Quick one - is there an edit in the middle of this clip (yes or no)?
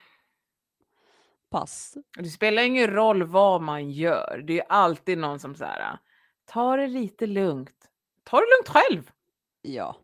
no